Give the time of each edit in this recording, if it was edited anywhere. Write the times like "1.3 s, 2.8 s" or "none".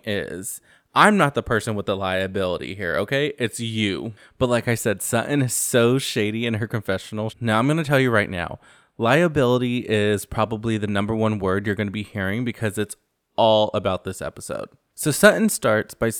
7.3 s